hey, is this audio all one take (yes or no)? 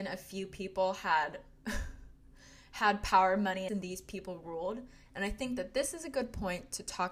no